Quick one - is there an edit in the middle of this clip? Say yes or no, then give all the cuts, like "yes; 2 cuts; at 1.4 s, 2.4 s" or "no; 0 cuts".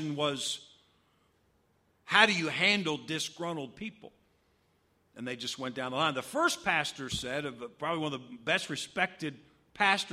no; 0 cuts